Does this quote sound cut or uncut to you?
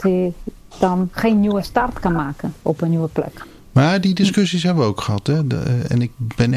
uncut